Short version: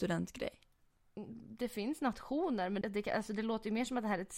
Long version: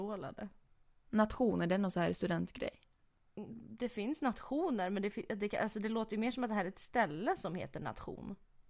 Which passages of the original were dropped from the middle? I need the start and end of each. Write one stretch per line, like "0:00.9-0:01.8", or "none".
0:05.0-0:05.3